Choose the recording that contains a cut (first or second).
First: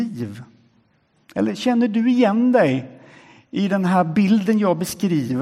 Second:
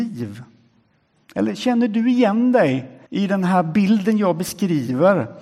second